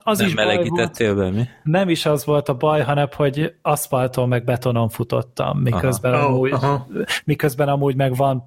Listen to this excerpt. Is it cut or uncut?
uncut